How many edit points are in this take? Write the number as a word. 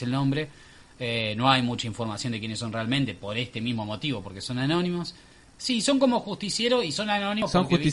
one